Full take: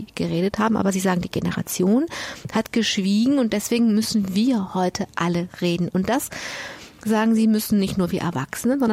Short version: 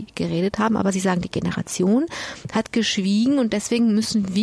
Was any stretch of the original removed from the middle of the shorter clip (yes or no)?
no